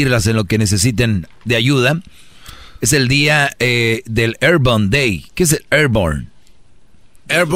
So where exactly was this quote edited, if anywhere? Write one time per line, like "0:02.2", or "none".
none